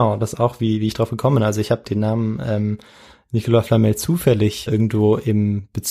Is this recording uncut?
no; 2 cuts; at 1.9 s, 4.7 s

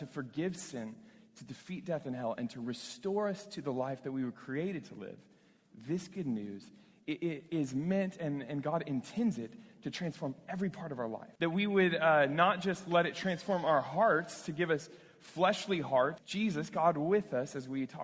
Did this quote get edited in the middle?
yes; 2 cuts; at 11.4 s, 16.2 s

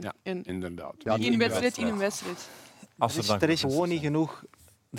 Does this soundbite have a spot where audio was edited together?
yes; 1 cut; at 3.6 s

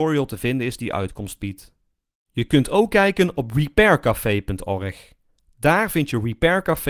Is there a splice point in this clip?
yes; 1 cut; at 2.3 s

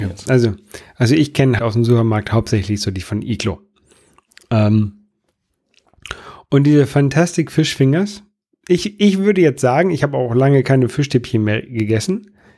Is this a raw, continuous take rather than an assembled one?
no; 1 cut; at 1.6 s

